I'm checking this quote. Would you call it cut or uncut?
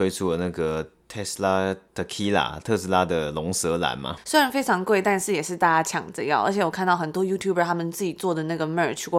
uncut